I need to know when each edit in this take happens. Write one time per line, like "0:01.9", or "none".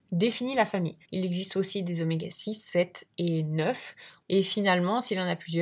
0:01.0
0:04.2

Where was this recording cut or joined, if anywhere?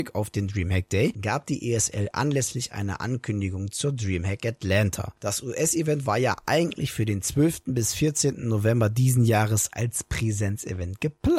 none

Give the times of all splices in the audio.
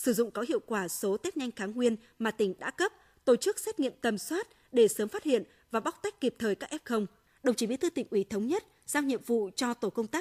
0:07.3

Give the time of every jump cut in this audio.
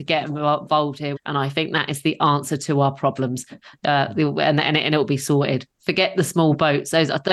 0:01.2

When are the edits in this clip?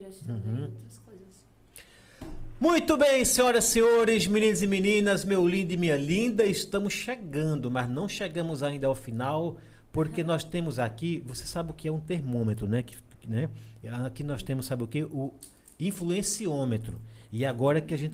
none

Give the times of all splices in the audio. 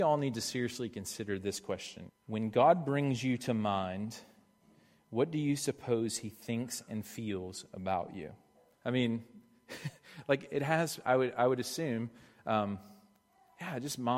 0:02.1
0:08.7
0:11.0

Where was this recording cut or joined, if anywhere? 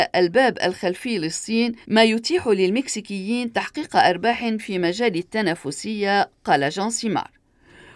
0:01.8

